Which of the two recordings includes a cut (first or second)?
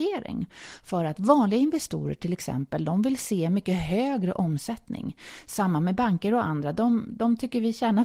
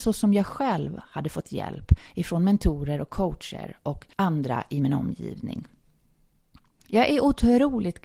second